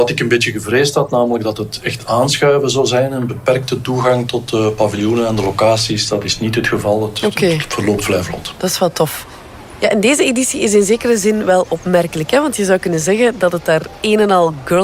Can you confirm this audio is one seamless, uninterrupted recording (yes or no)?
yes